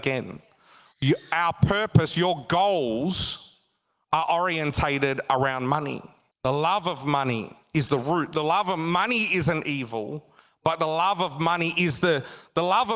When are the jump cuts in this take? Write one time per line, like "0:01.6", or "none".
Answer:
0:06.3